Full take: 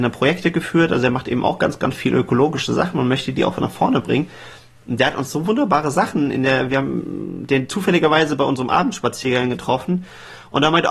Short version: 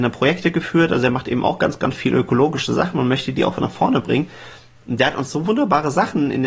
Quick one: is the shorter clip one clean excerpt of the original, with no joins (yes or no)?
yes